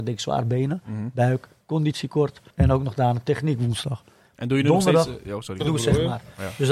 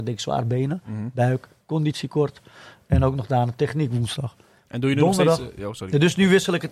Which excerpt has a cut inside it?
first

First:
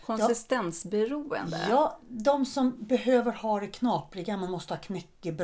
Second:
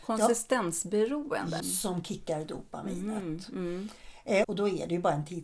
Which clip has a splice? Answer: second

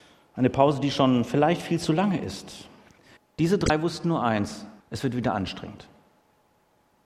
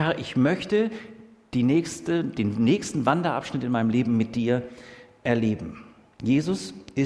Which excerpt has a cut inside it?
first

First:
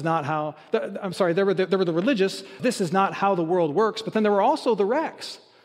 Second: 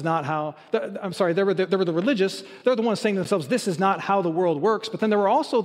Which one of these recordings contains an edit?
first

